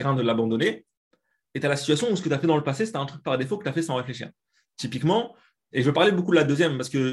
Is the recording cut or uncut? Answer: cut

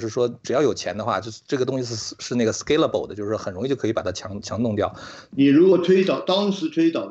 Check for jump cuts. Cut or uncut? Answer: cut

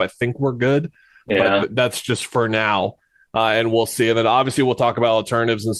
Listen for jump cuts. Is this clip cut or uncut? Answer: uncut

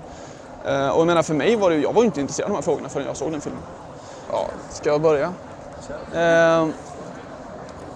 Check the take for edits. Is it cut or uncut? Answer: cut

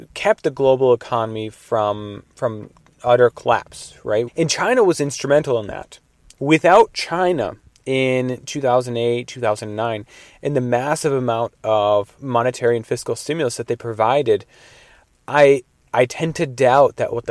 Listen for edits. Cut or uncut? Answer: cut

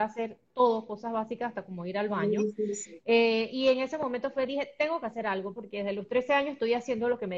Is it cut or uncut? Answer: cut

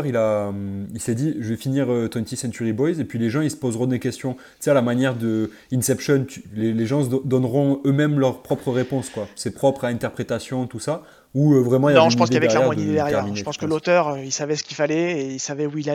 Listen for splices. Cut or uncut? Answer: uncut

